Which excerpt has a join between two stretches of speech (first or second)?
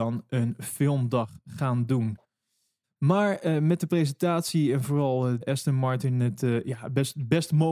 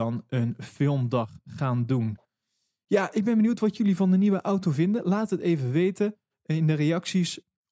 first